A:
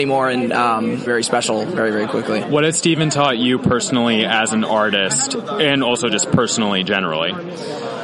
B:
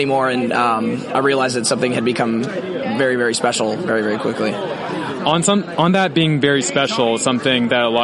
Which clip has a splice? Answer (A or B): A